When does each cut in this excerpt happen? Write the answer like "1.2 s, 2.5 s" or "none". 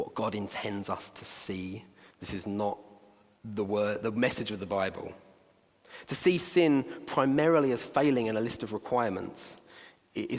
none